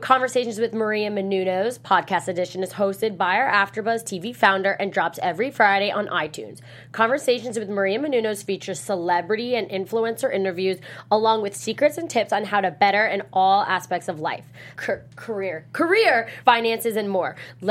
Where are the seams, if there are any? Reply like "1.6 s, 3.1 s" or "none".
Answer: 14.7 s, 16.4 s